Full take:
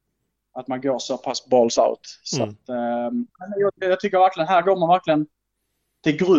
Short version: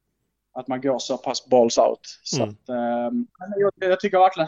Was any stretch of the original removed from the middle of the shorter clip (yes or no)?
no